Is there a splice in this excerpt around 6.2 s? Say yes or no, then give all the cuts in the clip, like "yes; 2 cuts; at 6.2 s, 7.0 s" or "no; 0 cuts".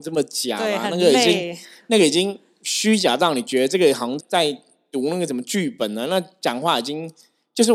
no; 1 cut; at 4.2 s